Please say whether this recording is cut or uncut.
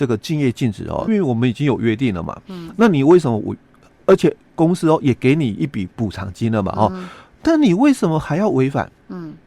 cut